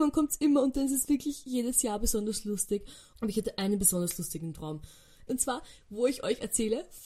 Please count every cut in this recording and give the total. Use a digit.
2